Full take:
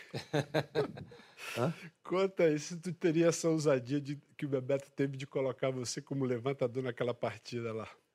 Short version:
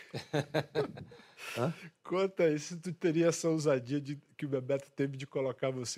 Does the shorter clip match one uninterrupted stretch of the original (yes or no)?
yes